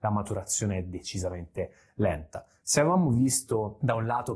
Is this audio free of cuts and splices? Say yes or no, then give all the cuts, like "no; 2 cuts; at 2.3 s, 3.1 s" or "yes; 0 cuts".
no; 1 cut; at 2.6 s